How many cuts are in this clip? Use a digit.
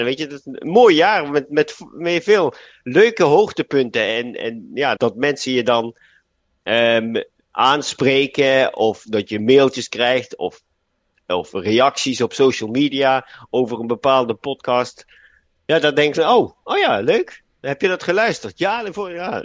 1